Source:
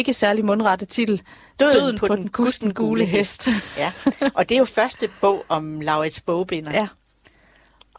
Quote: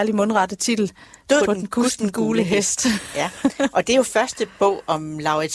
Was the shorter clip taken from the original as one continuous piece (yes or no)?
no